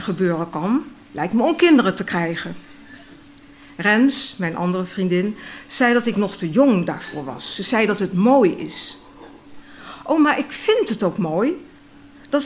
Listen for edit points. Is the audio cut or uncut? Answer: uncut